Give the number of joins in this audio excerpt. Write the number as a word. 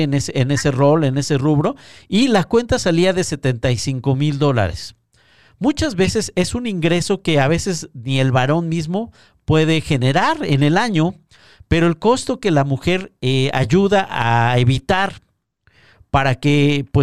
zero